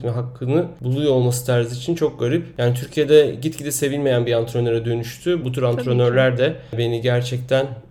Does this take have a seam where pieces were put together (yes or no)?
yes